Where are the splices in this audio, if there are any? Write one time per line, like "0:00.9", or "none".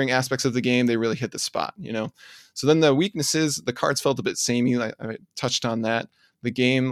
none